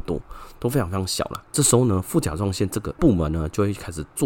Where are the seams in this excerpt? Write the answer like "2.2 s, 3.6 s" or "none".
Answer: 1.4 s

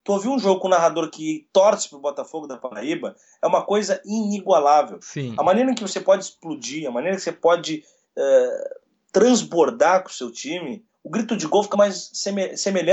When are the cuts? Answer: 11.7 s

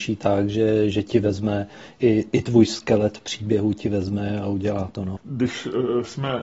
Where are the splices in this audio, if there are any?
5.2 s

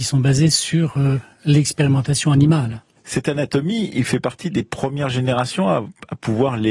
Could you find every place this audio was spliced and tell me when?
3.0 s

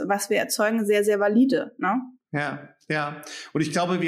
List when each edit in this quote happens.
none

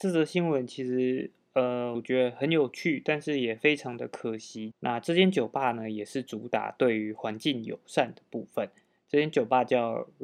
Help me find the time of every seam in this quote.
1.9 s, 4.7 s

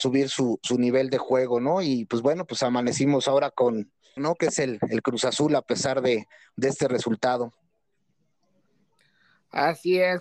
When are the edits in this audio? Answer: 4.2 s

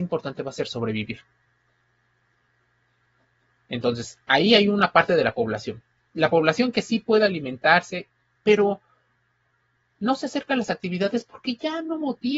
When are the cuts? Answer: 8.4 s

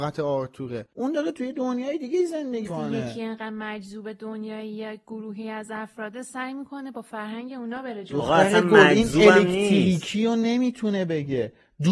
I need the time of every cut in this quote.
0.9 s, 2.7 s

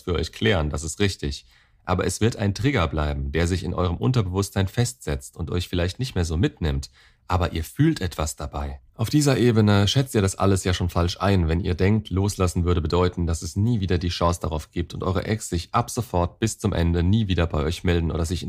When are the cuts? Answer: 8.9 s

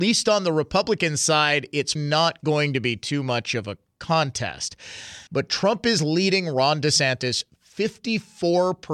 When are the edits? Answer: 2.0 s, 5.3 s

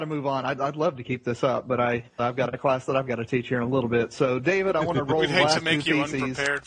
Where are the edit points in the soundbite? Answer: 2.2 s

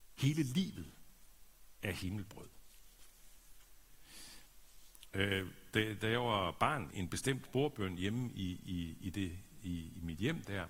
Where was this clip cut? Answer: 6.9 s

